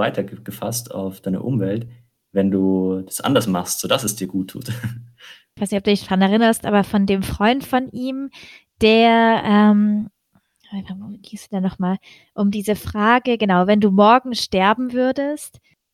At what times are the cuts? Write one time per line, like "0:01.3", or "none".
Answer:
0:05.6